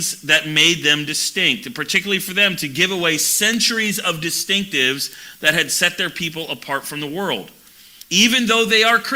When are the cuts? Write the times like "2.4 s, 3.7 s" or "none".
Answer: 8.0 s